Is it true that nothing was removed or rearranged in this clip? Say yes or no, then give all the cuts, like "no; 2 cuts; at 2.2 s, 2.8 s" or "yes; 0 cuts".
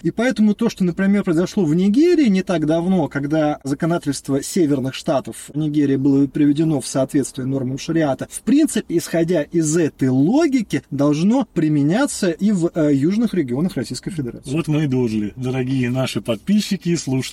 yes; 0 cuts